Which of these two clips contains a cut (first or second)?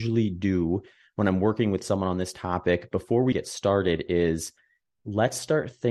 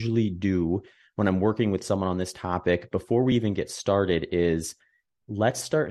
first